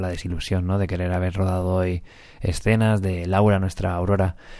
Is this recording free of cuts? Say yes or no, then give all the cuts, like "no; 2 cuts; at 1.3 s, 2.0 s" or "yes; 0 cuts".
yes; 0 cuts